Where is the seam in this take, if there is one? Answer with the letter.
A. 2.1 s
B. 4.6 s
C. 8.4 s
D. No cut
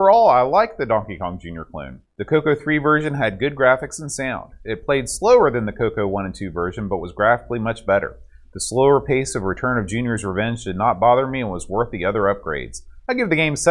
A